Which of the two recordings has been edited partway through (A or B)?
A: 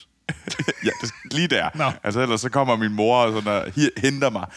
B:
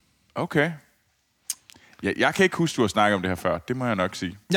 A